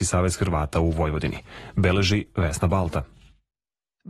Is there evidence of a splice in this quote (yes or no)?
no